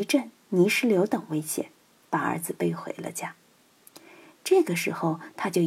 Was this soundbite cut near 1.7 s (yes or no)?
no